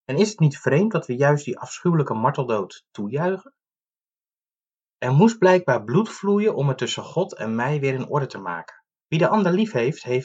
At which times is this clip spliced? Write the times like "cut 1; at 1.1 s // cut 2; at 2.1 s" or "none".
cut 1; at 9.0 s